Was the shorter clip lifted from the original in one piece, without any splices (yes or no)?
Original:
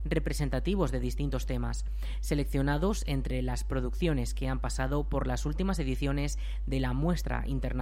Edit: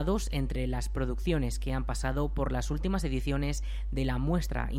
yes